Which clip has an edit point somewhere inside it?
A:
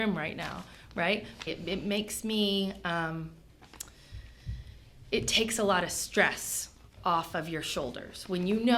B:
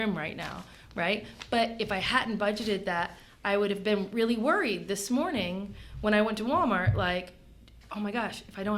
A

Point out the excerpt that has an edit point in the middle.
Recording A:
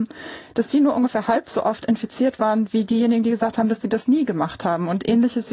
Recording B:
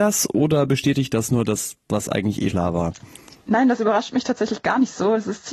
B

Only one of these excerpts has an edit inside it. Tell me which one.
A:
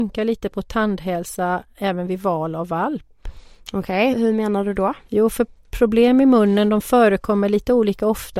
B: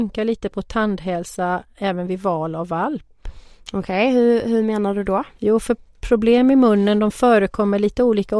A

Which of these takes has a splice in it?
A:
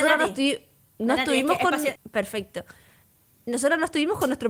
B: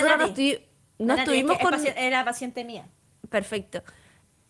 A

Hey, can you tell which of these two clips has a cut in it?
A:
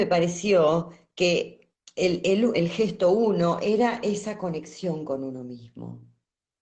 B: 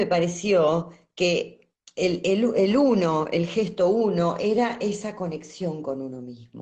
A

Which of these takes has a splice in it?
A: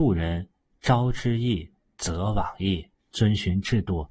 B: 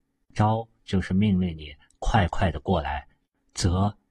A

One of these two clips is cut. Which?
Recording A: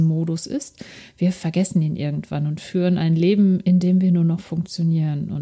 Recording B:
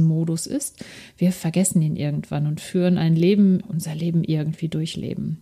B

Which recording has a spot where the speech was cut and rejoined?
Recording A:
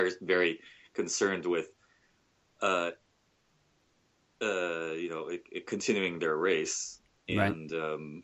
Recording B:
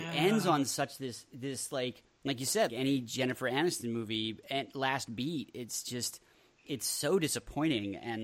B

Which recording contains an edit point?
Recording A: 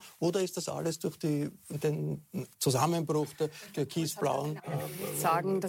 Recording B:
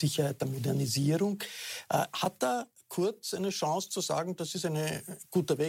A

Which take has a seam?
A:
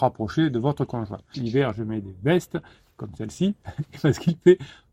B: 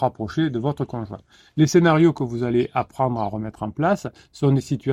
A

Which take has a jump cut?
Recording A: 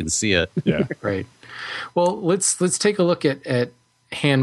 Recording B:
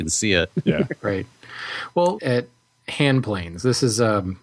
B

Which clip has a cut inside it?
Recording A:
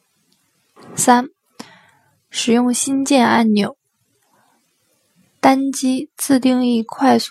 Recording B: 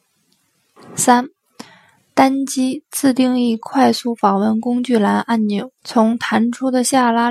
B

